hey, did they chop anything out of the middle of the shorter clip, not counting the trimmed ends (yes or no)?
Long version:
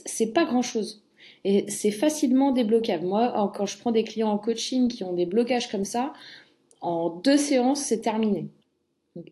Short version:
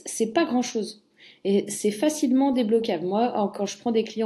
no